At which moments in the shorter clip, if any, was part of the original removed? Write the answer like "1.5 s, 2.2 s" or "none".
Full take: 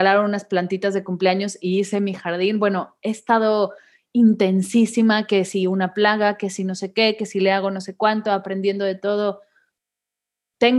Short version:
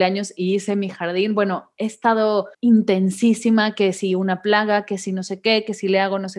2.5 s